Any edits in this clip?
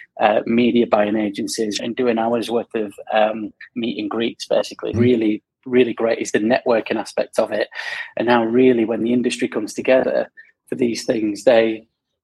yes; 2 cuts; at 1.8 s, 4.9 s

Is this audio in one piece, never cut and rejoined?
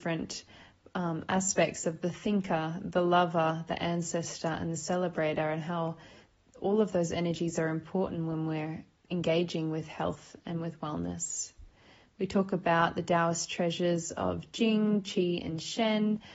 yes; 0 cuts

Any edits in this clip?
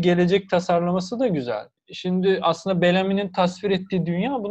yes; 1 cut; at 1.8 s

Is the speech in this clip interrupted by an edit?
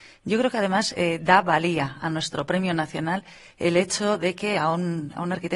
no; 0 cuts

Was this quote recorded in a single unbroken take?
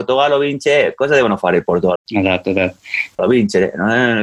no; 2 cuts; at 2.0 s, 3.2 s

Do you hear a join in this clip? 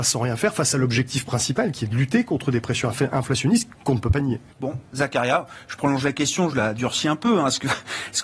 yes; 1 cut; at 4.5 s

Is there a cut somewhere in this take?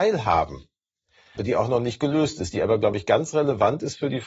yes; 2 cuts; at 1.4 s, 2.5 s

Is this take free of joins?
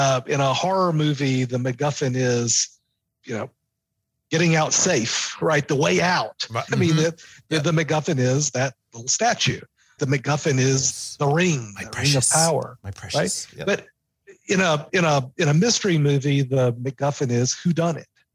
no; 3 cuts; at 3.1 s, 6.7 s, 10.0 s

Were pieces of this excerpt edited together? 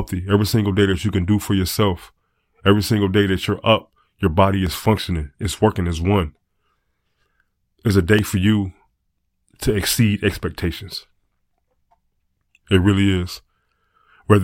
no; 0 cuts

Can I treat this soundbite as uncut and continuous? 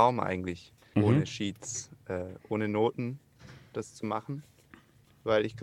no; 1 cut; at 0.9 s

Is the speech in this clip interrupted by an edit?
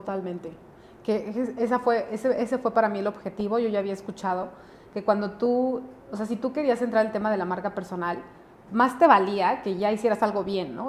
yes; 2 cuts; at 6.0 s, 8.7 s

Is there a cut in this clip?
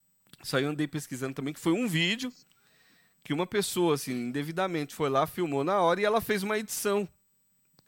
no; 0 cuts

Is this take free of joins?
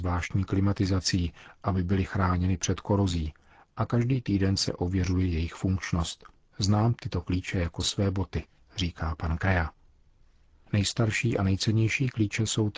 yes; 0 cuts

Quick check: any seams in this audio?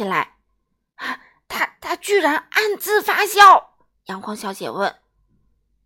yes; 1 cut; at 3.9 s

